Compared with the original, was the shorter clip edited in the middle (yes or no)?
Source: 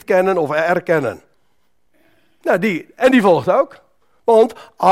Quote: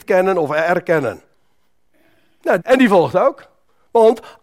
yes